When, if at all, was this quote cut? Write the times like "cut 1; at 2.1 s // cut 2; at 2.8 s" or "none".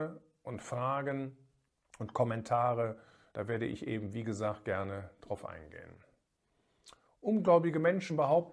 none